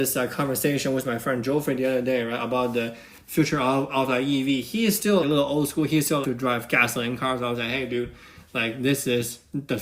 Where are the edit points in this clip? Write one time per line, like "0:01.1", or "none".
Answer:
0:05.2
0:06.2